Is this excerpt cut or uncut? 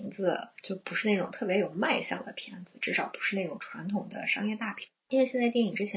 uncut